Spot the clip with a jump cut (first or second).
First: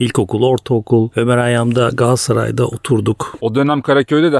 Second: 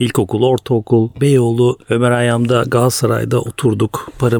first